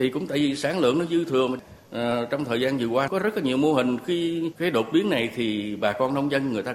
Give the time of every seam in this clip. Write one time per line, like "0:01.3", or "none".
0:01.8